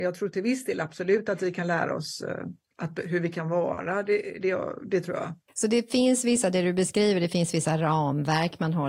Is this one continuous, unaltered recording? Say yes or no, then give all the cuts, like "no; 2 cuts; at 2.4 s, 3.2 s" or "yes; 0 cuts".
yes; 0 cuts